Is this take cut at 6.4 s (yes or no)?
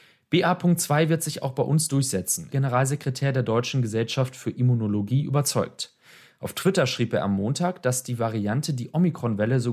no